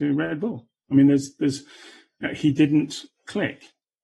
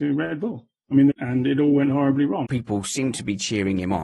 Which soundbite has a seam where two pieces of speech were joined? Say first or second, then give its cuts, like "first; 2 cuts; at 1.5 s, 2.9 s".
second; 2 cuts; at 1.1 s, 2.4 s